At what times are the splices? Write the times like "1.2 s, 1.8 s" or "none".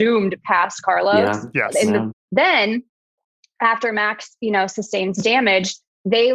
2.1 s